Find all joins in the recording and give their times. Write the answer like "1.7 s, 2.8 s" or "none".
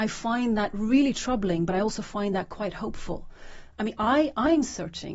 3.7 s